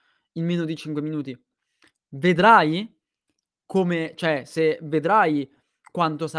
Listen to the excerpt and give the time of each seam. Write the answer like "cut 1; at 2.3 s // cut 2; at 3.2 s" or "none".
none